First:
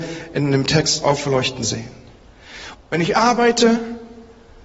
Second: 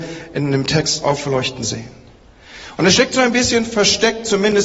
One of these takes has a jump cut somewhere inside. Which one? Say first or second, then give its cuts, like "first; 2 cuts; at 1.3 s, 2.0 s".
first; 1 cut; at 2.7 s